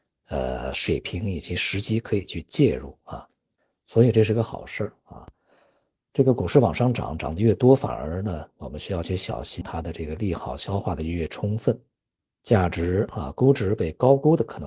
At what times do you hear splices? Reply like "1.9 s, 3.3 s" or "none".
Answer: 9.6 s